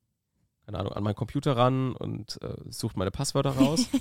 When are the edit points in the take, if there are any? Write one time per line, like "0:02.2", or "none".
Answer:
none